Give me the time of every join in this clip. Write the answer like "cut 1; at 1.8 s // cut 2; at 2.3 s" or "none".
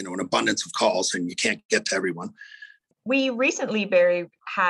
cut 1; at 2.9 s